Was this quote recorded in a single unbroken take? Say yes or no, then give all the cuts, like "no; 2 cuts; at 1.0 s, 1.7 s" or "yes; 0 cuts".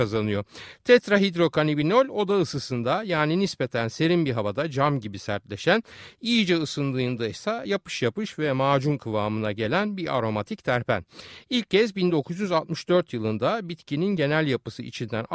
yes; 0 cuts